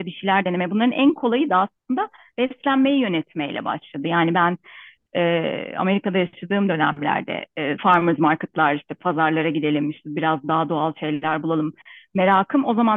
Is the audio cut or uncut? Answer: cut